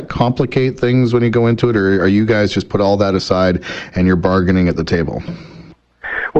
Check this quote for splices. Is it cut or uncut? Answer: uncut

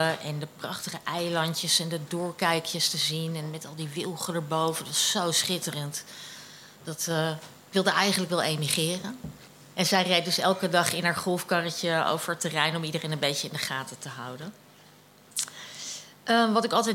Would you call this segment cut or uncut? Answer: cut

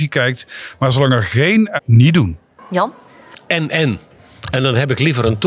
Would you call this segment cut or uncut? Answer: cut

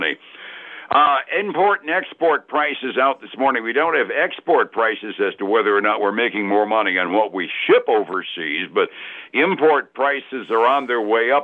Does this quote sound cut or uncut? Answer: uncut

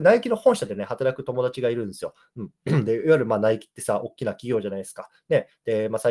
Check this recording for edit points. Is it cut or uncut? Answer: uncut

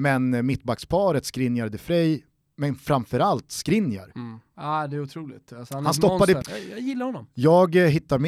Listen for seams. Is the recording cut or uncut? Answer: cut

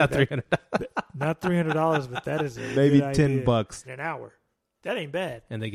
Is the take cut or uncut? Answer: cut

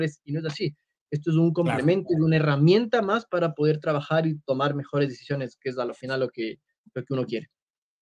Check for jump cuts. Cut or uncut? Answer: uncut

